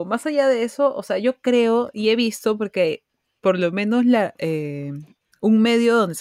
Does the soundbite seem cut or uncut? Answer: uncut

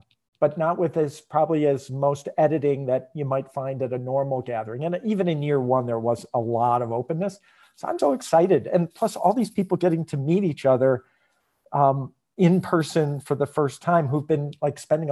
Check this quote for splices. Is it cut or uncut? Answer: cut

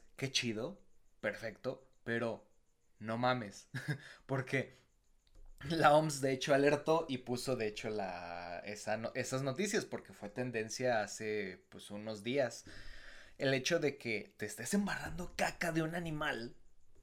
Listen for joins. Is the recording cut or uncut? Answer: uncut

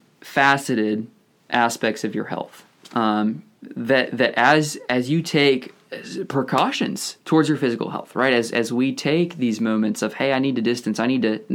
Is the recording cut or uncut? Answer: uncut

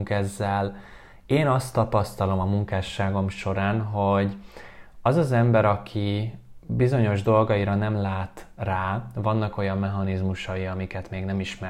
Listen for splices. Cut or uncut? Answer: uncut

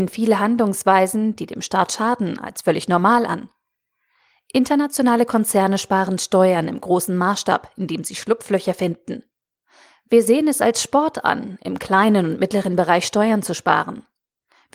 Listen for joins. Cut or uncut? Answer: uncut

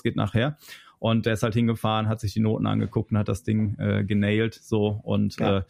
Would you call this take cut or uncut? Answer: uncut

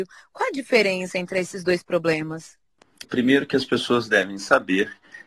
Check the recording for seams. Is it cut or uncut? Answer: cut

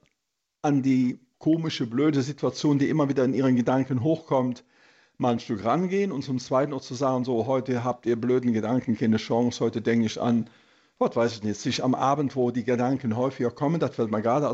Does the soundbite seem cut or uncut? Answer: cut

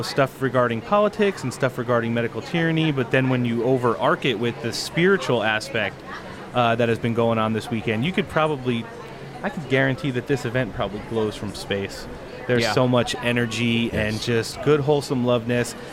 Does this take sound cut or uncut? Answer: uncut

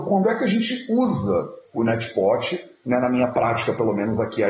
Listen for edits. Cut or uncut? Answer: uncut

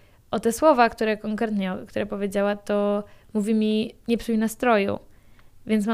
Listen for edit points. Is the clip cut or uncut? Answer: uncut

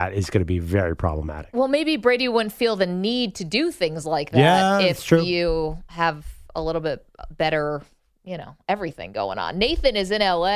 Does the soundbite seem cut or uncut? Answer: uncut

